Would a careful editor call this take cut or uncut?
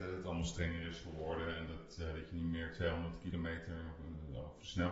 uncut